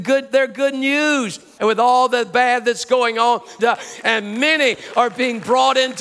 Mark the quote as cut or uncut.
cut